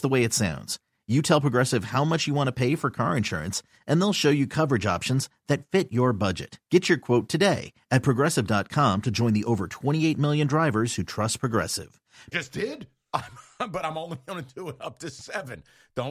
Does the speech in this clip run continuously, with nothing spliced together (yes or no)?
no